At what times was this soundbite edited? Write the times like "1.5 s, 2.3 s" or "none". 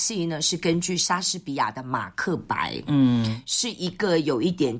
none